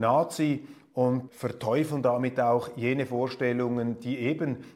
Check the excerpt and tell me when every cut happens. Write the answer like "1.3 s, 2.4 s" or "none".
1.3 s